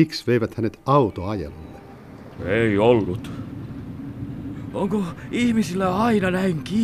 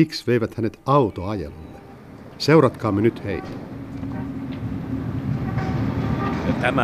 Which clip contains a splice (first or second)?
first